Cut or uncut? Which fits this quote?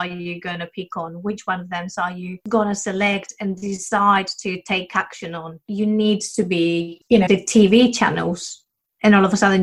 cut